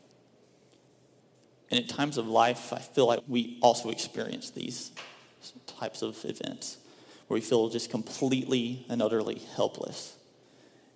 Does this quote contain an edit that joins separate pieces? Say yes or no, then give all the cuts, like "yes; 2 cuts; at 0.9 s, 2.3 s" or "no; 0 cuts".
yes; 1 cut; at 3.2 s